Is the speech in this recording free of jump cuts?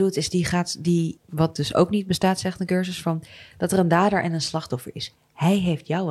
no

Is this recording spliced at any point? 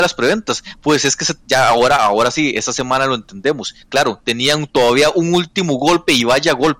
no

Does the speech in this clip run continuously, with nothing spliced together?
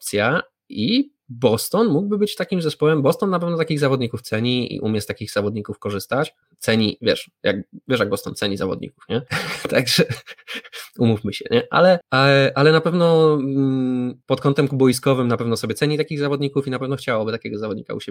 yes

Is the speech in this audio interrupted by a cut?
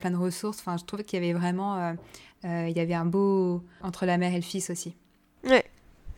yes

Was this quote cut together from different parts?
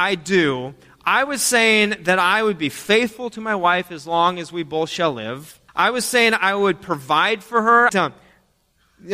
yes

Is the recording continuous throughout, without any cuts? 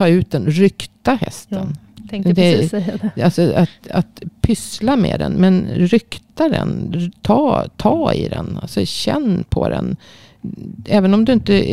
yes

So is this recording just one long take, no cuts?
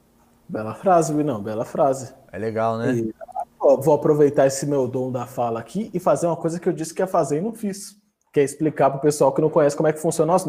yes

